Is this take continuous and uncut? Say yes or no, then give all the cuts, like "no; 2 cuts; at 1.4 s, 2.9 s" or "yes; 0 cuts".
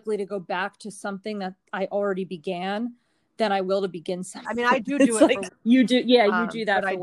no; 2 cuts; at 4.4 s, 5.5 s